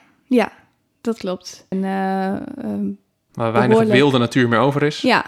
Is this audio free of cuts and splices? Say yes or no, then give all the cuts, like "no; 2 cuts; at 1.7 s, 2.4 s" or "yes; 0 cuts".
no; 1 cut; at 1.7 s